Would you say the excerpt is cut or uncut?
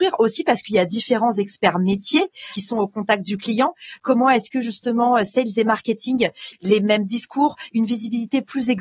cut